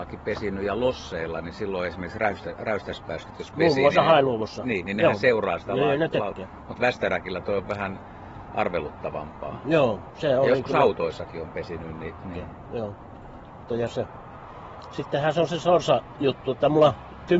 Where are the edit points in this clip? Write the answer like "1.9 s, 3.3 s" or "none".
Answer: 4.8 s, 12.2 s, 13.7 s